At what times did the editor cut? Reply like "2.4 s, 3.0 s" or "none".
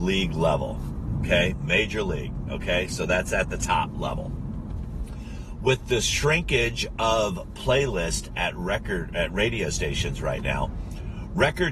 1.5 s